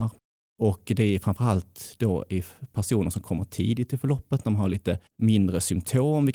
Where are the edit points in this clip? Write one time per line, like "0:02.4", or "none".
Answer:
0:05.1